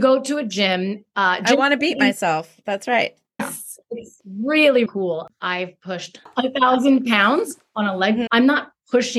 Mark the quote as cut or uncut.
cut